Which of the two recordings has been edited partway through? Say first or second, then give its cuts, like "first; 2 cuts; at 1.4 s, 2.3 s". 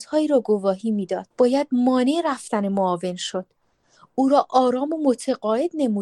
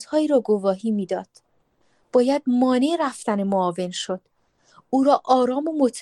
first; 1 cut; at 1.3 s